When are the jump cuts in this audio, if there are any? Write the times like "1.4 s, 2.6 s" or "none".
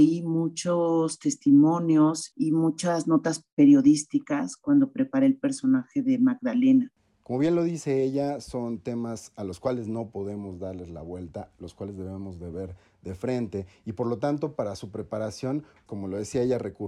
2.3 s, 15.9 s